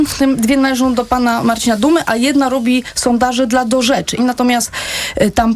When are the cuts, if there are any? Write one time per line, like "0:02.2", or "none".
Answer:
0:04.2